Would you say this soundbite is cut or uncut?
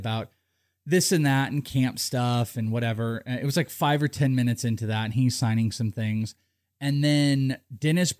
uncut